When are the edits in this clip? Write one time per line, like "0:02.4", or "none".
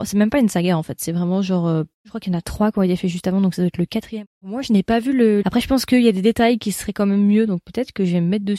0:05.4